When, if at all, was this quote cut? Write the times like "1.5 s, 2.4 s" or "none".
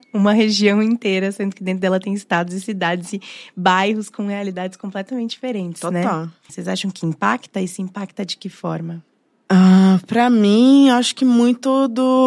6.5 s

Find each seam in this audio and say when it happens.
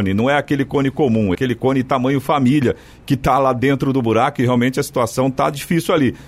1.3 s

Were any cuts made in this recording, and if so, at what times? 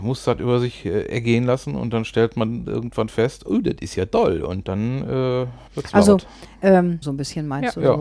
5.7 s, 7.0 s

